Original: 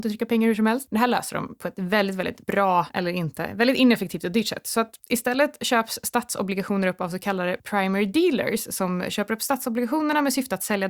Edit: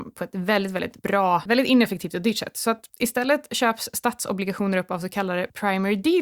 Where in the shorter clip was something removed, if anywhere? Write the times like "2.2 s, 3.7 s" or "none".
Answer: 1.5 s